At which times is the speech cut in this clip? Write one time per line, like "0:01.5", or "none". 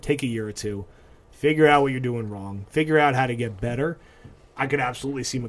none